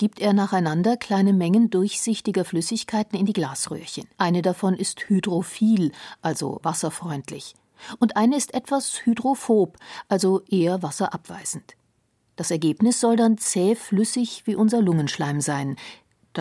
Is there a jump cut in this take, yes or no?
yes